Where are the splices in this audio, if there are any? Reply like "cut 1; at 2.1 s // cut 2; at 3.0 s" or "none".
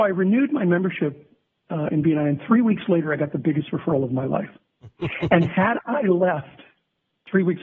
cut 1; at 1.9 s